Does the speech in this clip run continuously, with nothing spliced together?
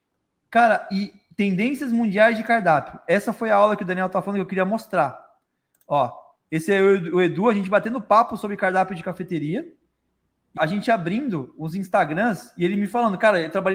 no; 1 cut; at 10.6 s

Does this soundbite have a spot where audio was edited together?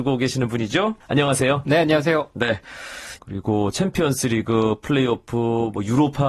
yes; 2 cuts; at 1.0 s, 3.2 s

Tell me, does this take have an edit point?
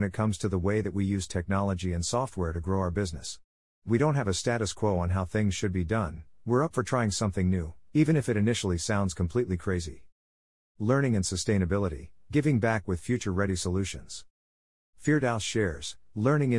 no; 0 cuts

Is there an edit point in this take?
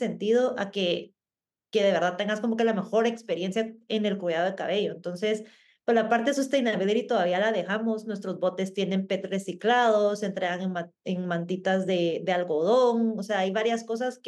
no; 0 cuts

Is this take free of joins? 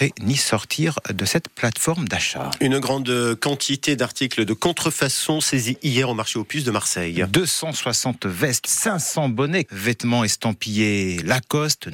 no; 2 cuts; at 8.6 s, 9.6 s

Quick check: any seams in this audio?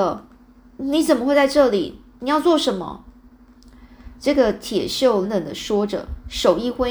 yes; 1 cut; at 5.2 s

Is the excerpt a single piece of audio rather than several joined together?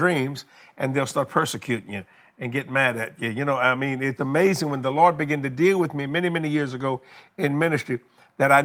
no; 1 cut; at 4.2 s

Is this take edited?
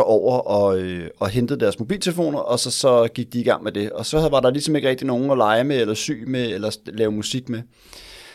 no; 0 cuts

